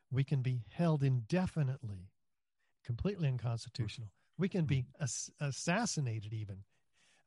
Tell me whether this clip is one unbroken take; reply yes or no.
yes